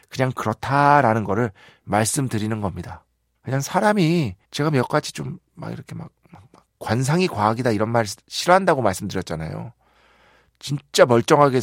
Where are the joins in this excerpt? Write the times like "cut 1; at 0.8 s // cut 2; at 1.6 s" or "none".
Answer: cut 1; at 3.3 s // cut 2; at 4.4 s